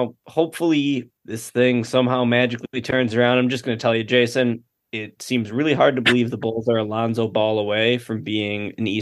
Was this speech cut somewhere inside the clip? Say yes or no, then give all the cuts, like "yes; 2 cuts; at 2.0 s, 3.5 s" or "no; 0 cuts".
yes; 1 cut; at 1.2 s